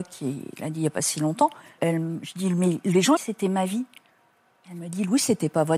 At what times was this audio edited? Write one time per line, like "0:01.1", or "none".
0:01.8
0:03.2